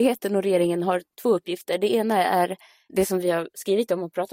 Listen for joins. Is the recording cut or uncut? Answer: cut